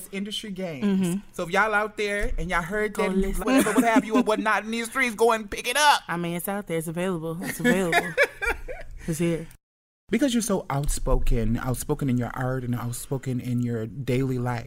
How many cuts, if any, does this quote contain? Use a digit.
1